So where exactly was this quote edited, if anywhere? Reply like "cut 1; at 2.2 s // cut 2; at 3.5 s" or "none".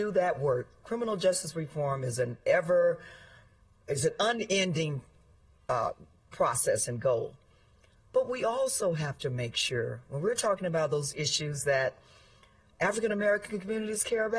none